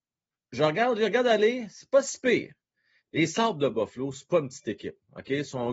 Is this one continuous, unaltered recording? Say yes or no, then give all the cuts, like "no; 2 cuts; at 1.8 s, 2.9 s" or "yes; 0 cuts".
no; 1 cut; at 3.0 s